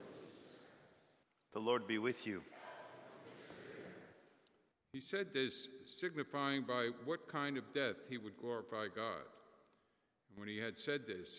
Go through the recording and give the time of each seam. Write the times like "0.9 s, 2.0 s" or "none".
4.7 s